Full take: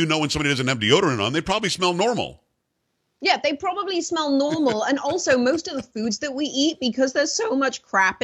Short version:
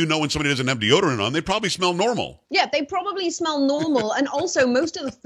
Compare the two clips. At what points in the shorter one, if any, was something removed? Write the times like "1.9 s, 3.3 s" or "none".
2.4 s